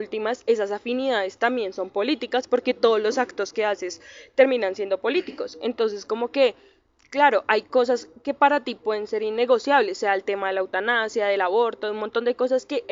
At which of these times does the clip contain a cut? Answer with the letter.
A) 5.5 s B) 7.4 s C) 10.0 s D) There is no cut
D